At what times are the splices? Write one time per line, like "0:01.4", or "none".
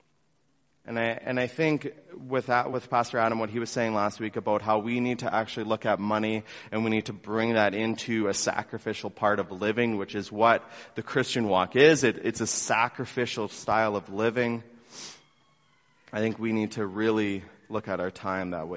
none